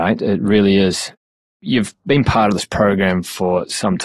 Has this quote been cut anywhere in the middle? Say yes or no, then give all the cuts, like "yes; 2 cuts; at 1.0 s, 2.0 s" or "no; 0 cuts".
no; 0 cuts